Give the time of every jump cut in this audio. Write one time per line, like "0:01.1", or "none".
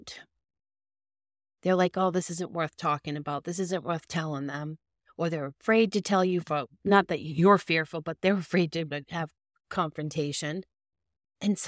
none

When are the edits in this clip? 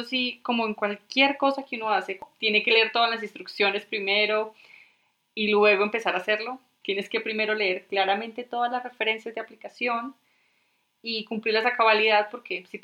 0:06.8

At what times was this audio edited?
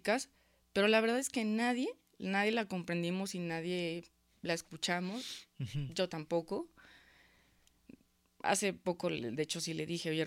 none

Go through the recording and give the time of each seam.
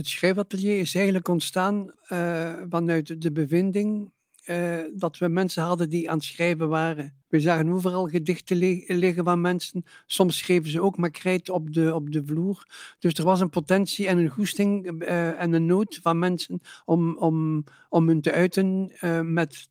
0:01.9
0:07.2

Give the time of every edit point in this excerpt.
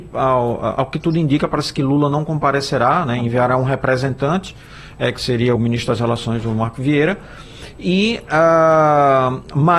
0:05.6

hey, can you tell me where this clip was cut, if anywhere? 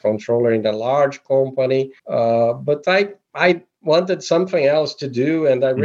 0:02.0

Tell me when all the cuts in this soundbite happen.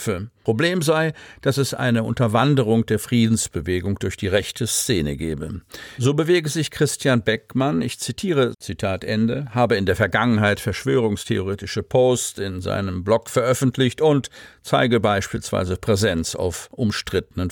0:06.0
0:08.5

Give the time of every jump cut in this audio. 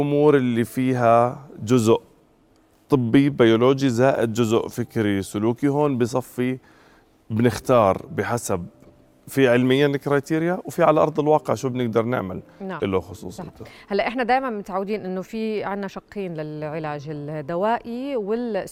0:12.8

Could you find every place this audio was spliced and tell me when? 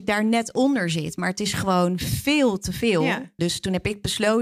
0:03.4

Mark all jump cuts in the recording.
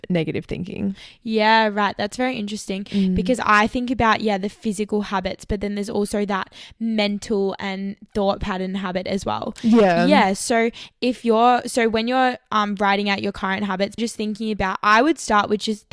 0:14.0

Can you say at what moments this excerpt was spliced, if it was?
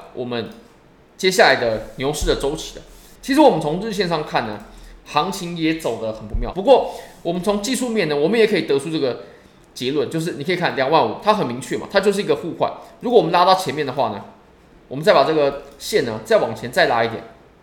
0:03.2
0:06.5

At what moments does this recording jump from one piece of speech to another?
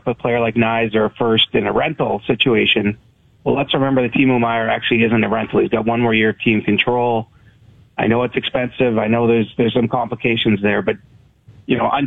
none

